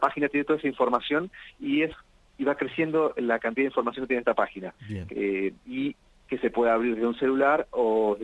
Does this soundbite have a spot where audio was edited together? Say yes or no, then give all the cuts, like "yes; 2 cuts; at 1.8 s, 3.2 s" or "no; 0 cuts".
yes; 1 cut; at 5.1 s